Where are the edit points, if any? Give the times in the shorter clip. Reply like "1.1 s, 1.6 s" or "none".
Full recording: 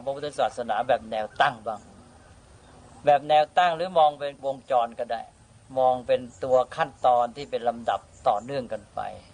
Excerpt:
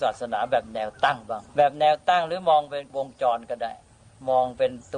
1.5 s